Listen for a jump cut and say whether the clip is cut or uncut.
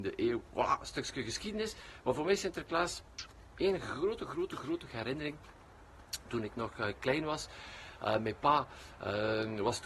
uncut